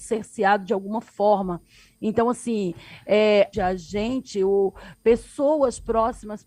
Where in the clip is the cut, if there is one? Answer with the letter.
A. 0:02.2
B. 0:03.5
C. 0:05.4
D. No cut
B